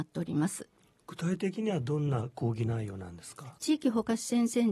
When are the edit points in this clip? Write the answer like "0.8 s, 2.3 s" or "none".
3.6 s